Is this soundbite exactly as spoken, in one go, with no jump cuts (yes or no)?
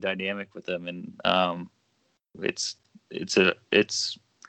yes